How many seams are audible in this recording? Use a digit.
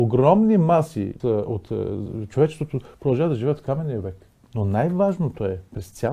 2